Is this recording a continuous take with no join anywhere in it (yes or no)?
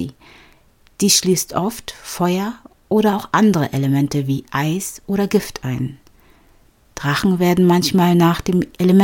yes